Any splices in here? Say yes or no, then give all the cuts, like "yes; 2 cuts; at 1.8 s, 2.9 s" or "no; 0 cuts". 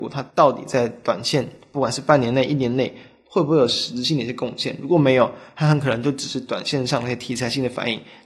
no; 0 cuts